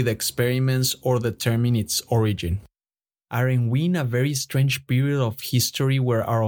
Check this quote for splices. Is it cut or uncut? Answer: uncut